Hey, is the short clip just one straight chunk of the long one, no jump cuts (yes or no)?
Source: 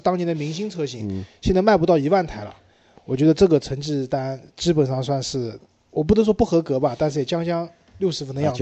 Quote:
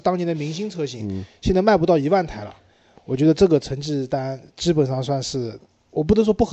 yes